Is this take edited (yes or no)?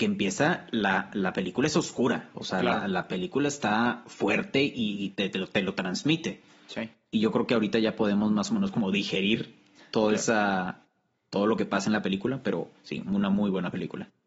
no